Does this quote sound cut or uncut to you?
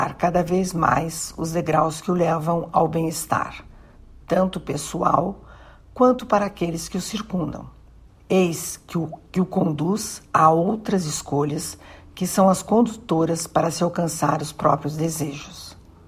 cut